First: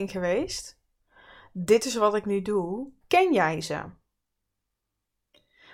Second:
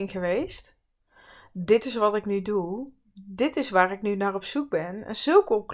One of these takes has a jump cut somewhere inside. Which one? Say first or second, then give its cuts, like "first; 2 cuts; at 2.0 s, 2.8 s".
first; 1 cut; at 3.0 s